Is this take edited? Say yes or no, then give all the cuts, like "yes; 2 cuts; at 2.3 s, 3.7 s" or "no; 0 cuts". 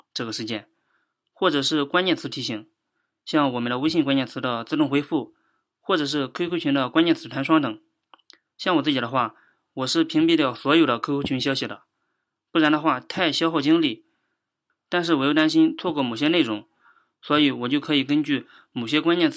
no; 0 cuts